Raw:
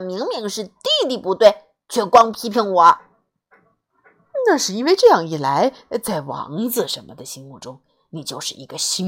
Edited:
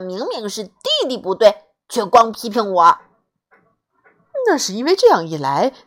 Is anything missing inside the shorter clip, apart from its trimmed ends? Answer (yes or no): no